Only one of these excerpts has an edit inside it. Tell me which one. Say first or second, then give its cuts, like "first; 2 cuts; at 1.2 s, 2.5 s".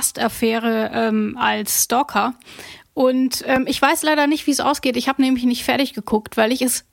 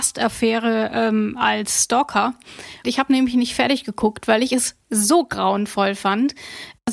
second; 1 cut; at 2.8 s